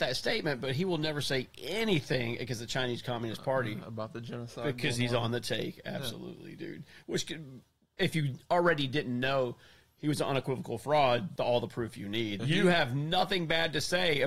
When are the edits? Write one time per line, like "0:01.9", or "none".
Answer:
0:11.4
0:12.4